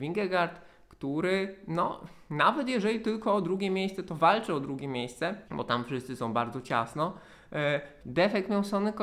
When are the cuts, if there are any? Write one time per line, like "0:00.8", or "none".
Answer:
0:05.5
0:08.0